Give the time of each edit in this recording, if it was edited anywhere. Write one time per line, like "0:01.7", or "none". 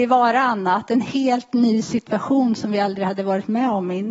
none